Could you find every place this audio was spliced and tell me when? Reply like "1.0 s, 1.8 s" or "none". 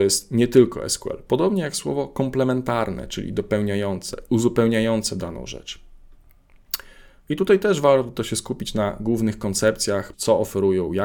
7.3 s, 10.1 s